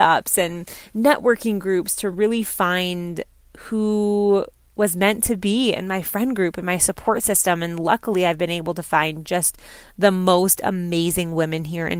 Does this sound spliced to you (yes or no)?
no